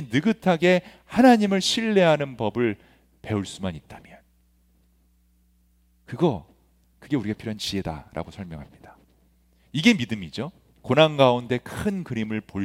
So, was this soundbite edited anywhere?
no; 0 cuts

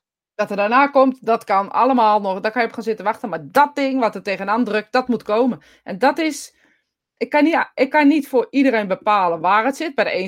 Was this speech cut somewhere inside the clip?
no; 0 cuts

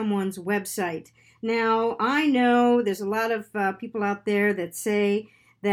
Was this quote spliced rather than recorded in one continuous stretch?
no; 0 cuts

